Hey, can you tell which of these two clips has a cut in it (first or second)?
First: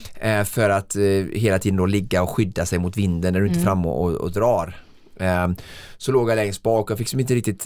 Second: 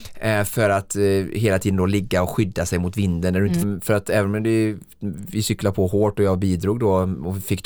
second